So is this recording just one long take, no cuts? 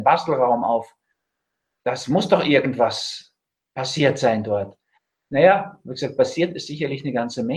yes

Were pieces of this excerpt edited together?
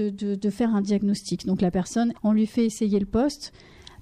yes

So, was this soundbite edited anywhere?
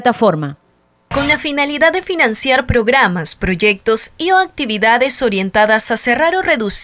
no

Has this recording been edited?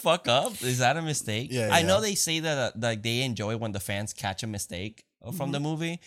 no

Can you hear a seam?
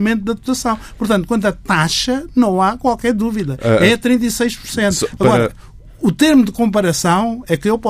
no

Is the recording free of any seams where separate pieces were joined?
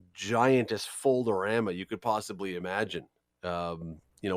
yes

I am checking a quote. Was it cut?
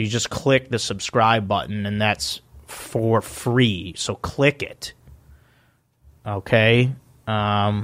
no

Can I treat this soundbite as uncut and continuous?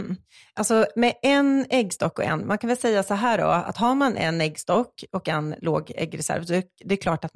yes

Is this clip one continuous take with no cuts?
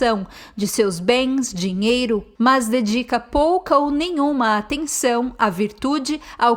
no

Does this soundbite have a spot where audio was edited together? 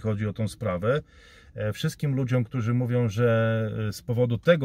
no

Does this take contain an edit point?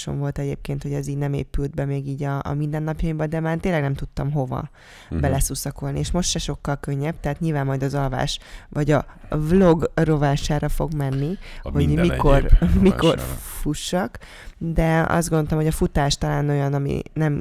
no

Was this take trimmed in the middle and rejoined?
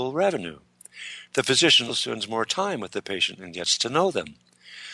yes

